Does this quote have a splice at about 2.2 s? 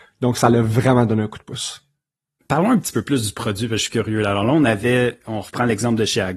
no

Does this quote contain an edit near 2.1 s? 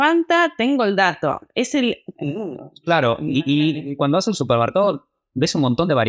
yes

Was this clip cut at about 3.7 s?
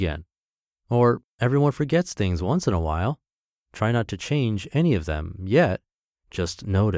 yes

